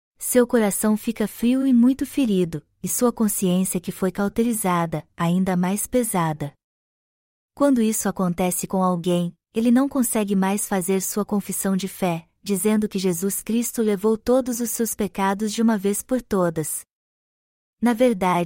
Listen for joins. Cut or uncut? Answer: uncut